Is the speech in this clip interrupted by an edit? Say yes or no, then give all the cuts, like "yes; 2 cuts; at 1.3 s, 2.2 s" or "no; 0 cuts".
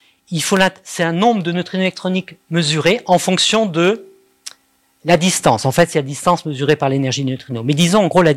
no; 0 cuts